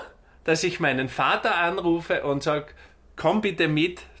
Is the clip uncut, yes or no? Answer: yes